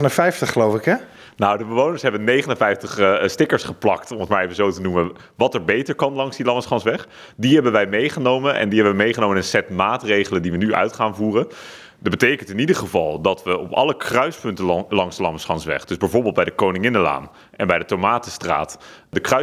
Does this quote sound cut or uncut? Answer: uncut